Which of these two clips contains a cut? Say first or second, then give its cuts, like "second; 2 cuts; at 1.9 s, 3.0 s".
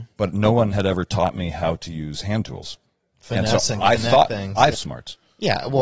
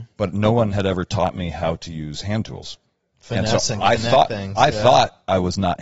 first; 1 cut; at 4.7 s